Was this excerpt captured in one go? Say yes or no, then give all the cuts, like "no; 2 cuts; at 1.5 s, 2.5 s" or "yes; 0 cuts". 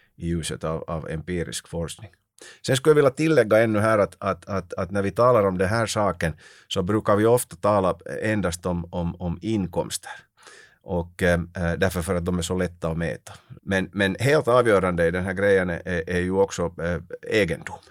no; 1 cut; at 13.6 s